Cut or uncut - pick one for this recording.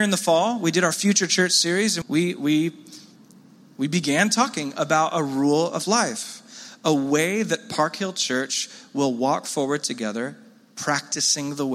cut